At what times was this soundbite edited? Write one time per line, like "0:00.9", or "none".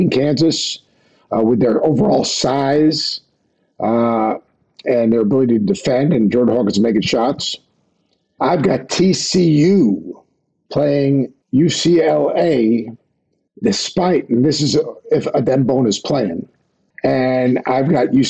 0:11.4

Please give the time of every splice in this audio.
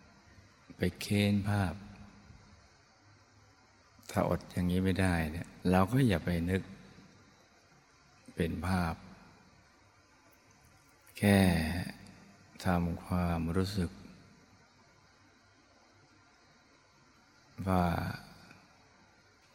0:05.6

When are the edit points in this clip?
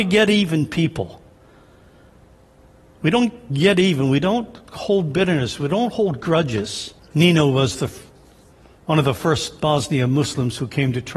0:07.0

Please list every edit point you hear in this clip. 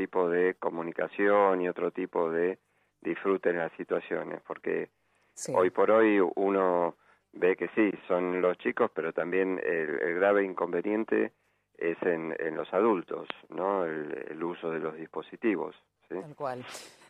none

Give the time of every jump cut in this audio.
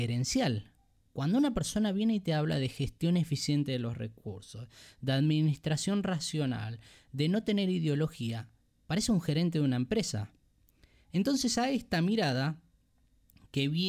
none

